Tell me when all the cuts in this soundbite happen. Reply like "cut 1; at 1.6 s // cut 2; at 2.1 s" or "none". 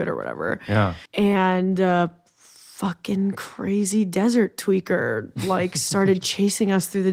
cut 1; at 1.0 s